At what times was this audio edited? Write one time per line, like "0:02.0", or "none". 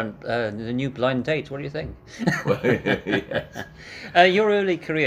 none

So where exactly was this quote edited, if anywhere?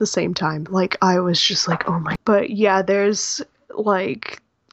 0:02.2

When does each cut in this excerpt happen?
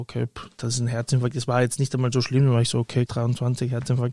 0:03.1

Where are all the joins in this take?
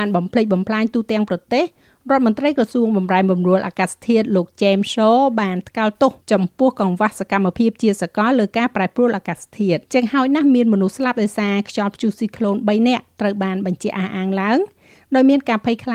0:06.2
0:09.9

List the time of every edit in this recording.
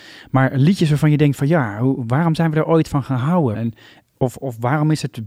0:03.5

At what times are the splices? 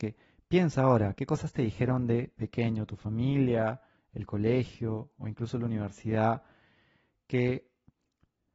none

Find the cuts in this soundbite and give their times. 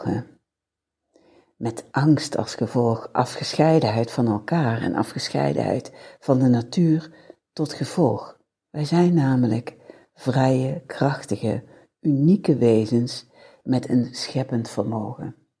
0:08.7

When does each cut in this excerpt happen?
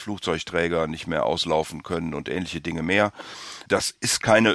none

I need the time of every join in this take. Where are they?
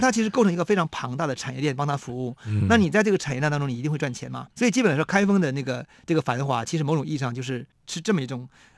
0:04.5

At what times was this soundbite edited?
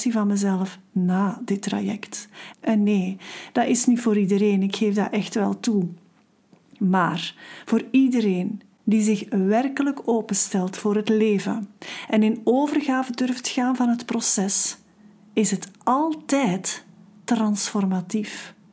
0:02.5

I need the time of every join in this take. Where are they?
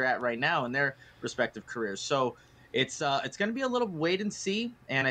none

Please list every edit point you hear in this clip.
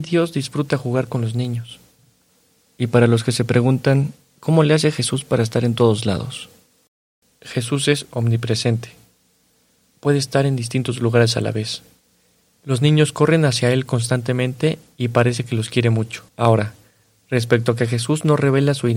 0:12.5
0:16.3

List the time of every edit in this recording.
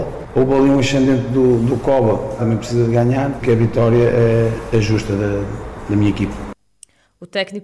0:02.4
0:03.4

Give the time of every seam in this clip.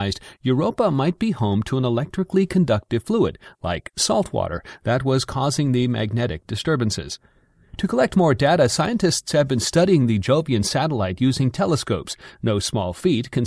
none

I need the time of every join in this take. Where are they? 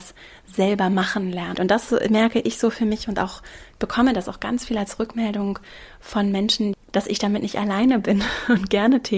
0:01.5
0:06.7

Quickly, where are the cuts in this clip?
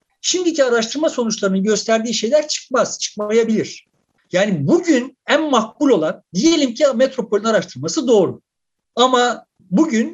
none

